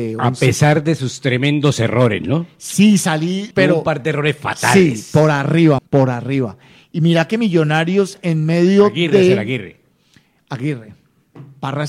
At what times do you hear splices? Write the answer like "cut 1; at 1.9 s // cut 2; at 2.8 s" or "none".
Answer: cut 1; at 3.5 s // cut 2; at 5.8 s